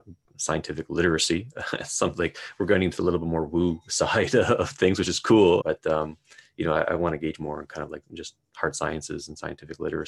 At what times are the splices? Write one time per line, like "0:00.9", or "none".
0:05.6